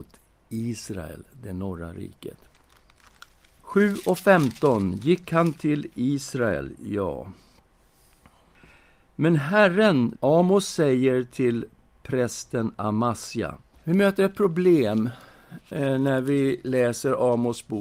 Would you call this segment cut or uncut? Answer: cut